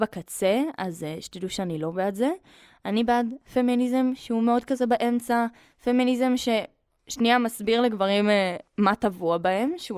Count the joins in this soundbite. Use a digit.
1